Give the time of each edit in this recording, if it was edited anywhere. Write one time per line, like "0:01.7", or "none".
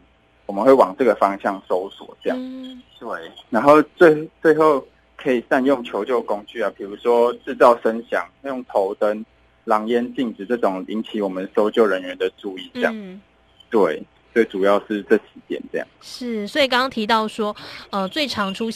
none